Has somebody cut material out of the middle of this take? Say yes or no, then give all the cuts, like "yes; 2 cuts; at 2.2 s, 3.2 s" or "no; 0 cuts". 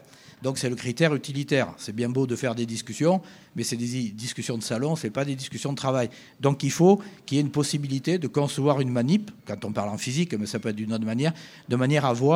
yes; 1 cut; at 9.4 s